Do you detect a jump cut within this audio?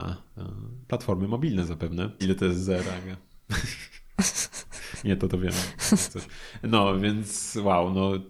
yes; 1 cut; at 2.2 s

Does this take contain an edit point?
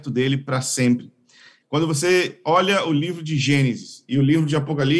yes; 1 cut; at 1.6 s

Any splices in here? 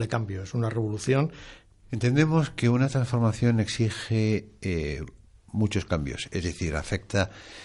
yes; 1 cut; at 1.8 s

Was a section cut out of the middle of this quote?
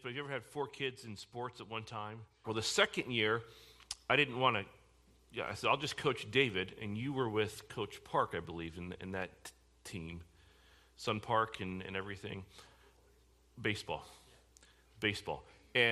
yes; 1 cut; at 2.4 s

